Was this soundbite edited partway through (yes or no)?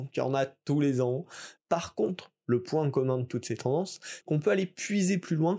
yes